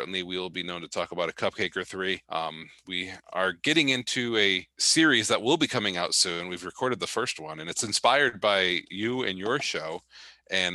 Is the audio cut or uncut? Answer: cut